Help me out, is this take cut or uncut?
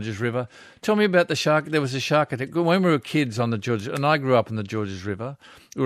uncut